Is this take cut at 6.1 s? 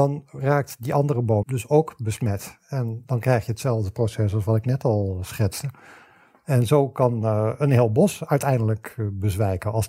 no; 1 cut; at 1.4 s

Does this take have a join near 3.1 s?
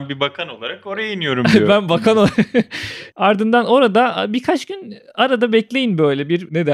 yes; 1 cut; at 3.1 s

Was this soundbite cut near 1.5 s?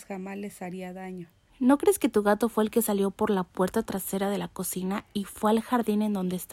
yes; 1 cut; at 1.5 s

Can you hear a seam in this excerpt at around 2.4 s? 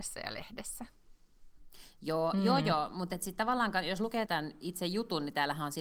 no; 1 cut; at 4.3 s

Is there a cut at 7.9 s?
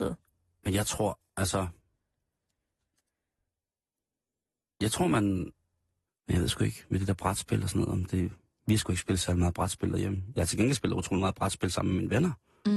no; 1 cut; at 6.1 s

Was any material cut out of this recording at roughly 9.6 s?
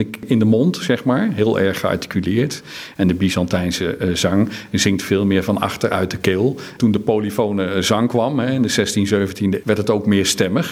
yes; 2 cuts; at 6.8 s, 9.6 s

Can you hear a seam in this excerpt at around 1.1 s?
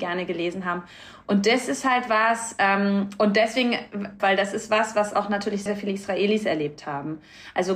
no; 2 cuts; at 4.2 s, 5.7 s

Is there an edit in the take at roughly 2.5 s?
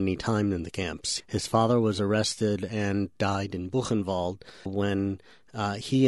no; 2 cuts; at 1.2 s, 4.7 s

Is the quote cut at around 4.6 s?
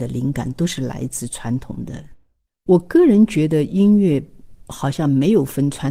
no; 1 cut; at 2.5 s

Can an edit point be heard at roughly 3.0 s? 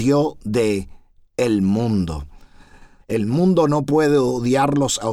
yes; 1 cut; at 3.0 s

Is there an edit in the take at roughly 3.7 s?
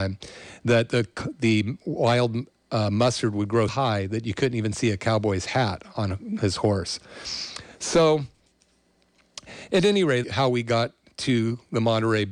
yes; 2 cuts; at 3.7 s, 10.2 s

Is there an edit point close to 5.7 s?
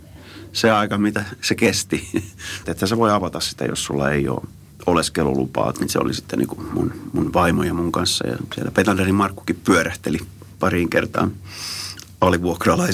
yes; 2 cuts; at 2.6 s, 5.7 s

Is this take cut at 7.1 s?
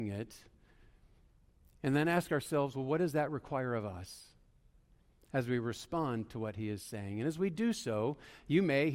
no; 0 cuts

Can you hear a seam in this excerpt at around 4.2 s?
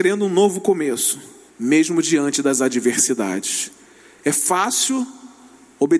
yes; 2 cuts; at 1.5 s, 4.2 s

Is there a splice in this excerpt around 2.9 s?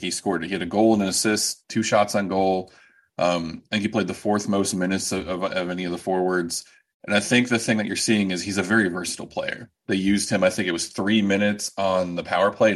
no; 0 cuts

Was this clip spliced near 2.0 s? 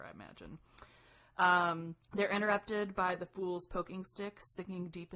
yes; 1 cut; at 2.0 s

